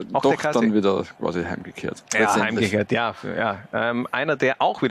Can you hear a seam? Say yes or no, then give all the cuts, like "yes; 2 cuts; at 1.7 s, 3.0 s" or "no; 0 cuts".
no; 0 cuts